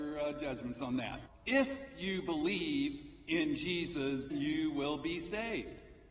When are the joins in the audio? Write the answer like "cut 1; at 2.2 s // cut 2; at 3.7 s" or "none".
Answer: cut 1; at 1.3 s // cut 2; at 4.3 s